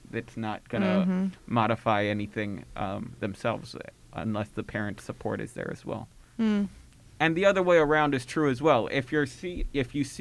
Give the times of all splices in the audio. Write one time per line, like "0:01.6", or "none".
0:06.4